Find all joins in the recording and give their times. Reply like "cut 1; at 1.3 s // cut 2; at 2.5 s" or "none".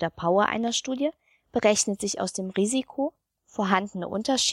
none